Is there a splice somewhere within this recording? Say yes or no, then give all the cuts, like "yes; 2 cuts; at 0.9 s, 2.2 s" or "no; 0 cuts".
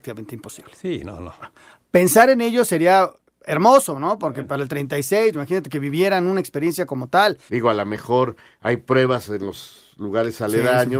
yes; 3 cuts; at 1.4 s, 5.3 s, 7.5 s